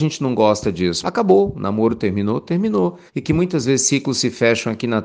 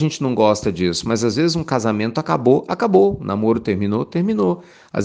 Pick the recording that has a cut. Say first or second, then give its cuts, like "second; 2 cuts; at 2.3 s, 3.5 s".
first; 2 cuts; at 1.0 s, 3.1 s